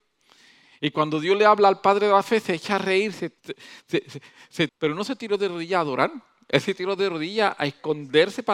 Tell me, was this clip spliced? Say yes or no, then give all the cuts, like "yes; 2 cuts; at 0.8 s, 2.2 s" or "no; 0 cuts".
yes; 2 cuts; at 3.4 s, 4.7 s